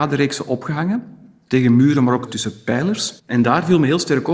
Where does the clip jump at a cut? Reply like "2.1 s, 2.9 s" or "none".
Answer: 3.2 s